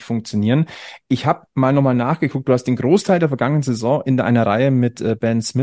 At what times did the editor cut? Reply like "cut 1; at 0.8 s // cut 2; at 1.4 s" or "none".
none